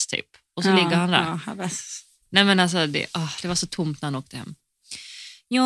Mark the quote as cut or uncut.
uncut